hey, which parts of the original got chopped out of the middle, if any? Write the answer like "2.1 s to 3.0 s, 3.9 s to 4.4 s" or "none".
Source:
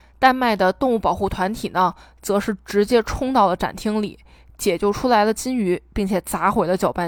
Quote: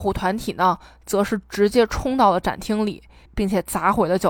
4.4 s to 5.8 s